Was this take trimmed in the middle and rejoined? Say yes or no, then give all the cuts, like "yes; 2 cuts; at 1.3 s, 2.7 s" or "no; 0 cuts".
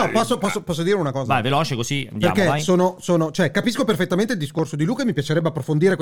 no; 0 cuts